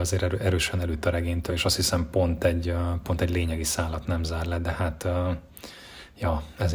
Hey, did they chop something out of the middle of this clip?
no; 0 cuts

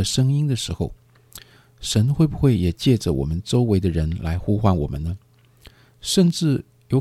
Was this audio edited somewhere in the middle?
no; 0 cuts

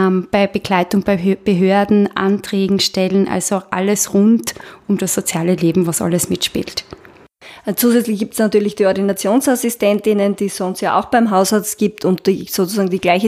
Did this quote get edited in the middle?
no; 0 cuts

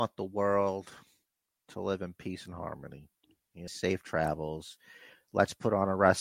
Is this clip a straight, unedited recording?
no; 1 cut; at 3.7 s

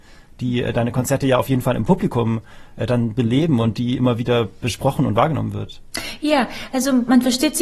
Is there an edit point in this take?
no; 0 cuts

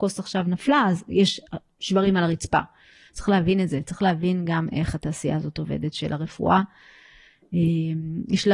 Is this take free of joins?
no; 1 cut; at 3.1 s

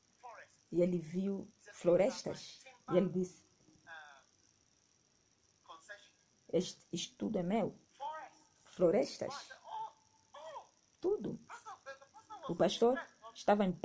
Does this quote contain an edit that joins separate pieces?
no; 0 cuts

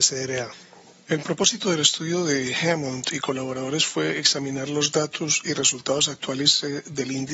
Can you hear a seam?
yes; 1 cut; at 1.0 s

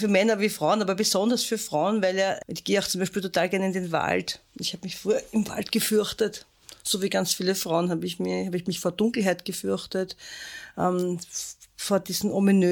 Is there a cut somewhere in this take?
no; 0 cuts

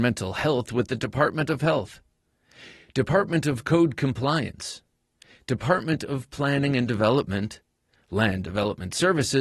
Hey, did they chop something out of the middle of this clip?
no; 0 cuts

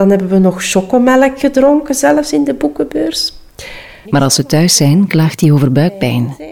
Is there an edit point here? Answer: yes; 1 cut; at 4.0 s

